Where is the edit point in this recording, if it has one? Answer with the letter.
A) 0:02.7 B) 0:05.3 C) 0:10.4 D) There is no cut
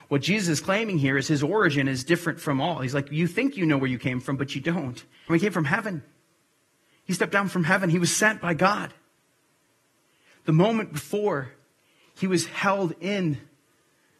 B